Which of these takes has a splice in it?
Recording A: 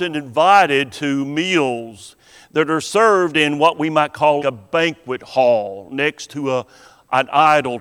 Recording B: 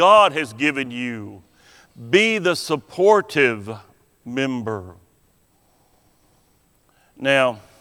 A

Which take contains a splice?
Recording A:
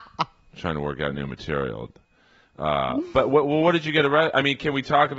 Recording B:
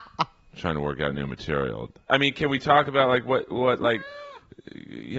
B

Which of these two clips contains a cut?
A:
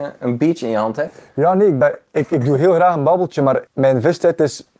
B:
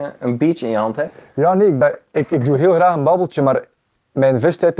A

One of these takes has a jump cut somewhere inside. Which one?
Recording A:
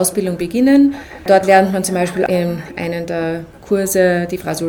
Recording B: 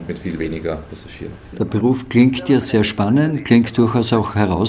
B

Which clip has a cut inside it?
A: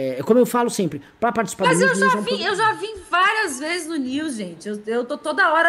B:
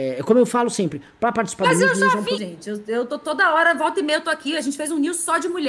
B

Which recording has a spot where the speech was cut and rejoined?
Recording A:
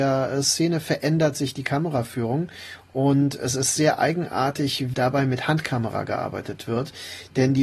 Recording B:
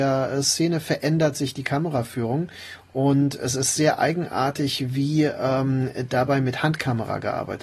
A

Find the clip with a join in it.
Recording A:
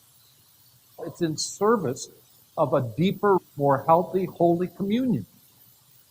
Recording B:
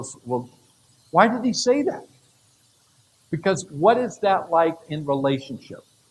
A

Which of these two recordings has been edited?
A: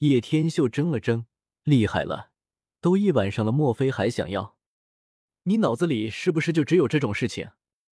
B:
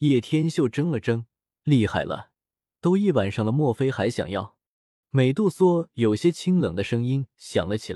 B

